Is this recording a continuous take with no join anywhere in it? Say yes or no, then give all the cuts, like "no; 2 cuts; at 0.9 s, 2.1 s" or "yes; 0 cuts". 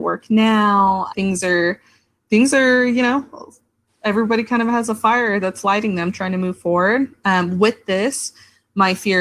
no; 1 cut; at 1.1 s